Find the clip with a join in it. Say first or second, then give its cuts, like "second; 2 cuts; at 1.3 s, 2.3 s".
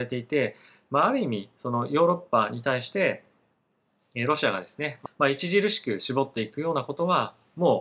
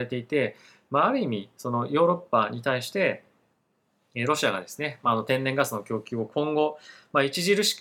first; 1 cut; at 5.1 s